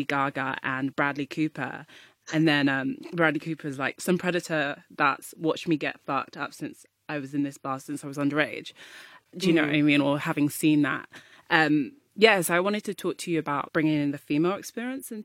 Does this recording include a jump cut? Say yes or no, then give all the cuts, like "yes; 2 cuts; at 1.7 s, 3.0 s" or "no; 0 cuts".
yes; 3 cuts; at 2.2 s, 9.3 s, 13.7 s